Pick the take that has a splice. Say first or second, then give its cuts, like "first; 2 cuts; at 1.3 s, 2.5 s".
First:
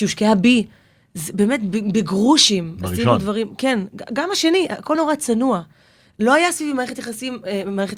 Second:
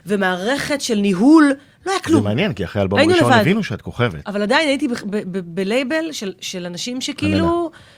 first; 1 cut; at 4.9 s